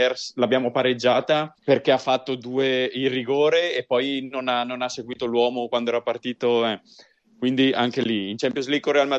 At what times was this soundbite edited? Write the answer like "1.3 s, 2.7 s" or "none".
1.6 s